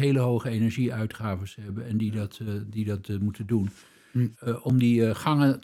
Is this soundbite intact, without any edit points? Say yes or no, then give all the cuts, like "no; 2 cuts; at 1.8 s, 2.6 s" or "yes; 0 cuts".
no; 1 cut; at 4.3 s